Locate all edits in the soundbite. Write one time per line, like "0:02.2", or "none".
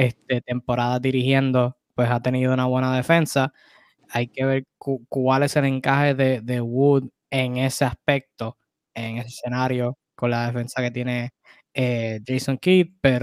none